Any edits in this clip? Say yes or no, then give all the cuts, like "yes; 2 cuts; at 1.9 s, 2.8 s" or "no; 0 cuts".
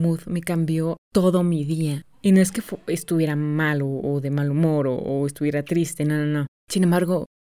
no; 0 cuts